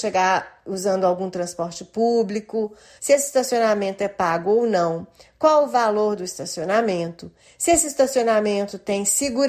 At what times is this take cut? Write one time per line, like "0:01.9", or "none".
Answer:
0:03.0